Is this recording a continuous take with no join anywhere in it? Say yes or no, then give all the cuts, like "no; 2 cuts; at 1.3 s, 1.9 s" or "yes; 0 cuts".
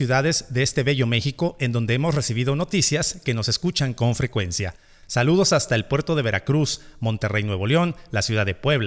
yes; 0 cuts